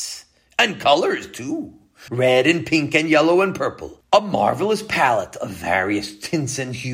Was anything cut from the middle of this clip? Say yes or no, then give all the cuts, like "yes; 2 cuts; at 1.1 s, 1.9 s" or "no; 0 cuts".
yes; 1 cut; at 2.1 s